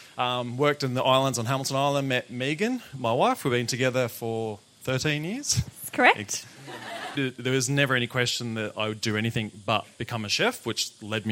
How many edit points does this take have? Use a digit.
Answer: 2